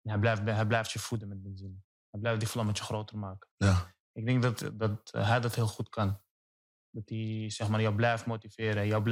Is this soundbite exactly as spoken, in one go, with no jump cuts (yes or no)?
yes